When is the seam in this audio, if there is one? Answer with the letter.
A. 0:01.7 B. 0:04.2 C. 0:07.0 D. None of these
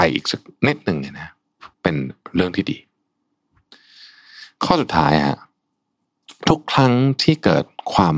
A